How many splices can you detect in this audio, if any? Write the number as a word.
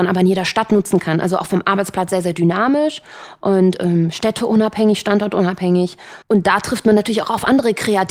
one